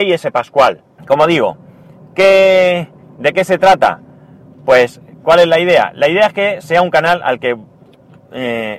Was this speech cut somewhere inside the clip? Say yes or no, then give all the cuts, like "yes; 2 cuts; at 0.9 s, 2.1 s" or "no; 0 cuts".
yes; 1 cut; at 1.0 s